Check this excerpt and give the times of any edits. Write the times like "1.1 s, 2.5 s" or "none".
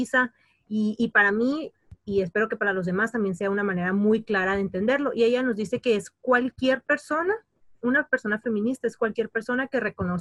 none